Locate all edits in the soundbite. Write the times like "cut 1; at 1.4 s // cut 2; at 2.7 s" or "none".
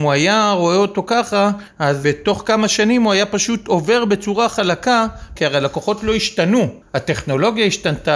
cut 1; at 2.0 s // cut 2; at 5.3 s